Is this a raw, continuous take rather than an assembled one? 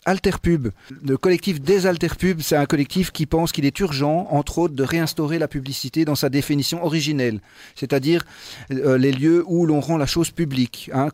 yes; 0 cuts

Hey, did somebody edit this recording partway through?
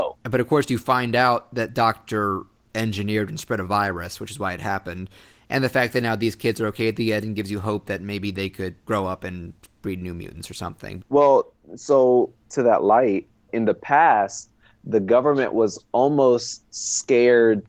yes; 3 cuts; at 8.8 s, 11.0 s, 13.5 s

